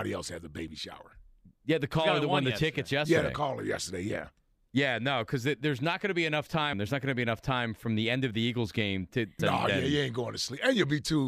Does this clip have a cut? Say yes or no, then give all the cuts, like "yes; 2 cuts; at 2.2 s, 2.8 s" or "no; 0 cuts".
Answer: yes; 2 cuts; at 6.7 s, 9.4 s